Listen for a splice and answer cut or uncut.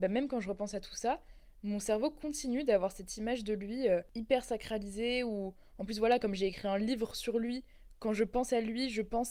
uncut